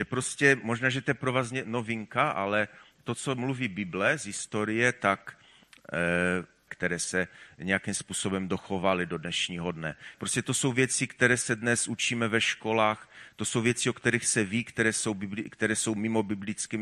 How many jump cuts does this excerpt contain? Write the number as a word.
two